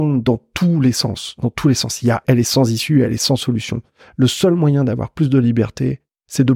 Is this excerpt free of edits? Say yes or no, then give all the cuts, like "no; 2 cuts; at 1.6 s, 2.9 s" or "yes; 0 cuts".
no; 1 cut; at 2.2 s